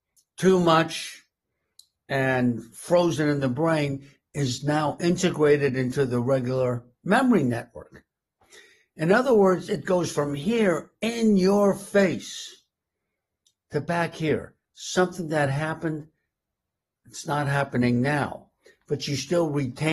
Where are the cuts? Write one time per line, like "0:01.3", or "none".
none